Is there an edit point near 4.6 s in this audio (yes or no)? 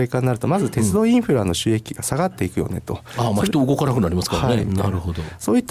yes